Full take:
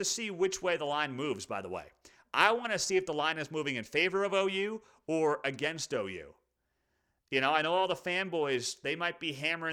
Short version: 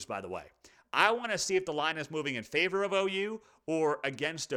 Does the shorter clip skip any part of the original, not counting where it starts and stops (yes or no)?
no